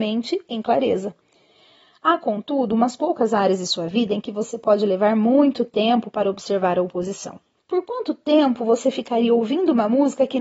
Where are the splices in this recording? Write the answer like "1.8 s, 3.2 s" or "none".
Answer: 7.6 s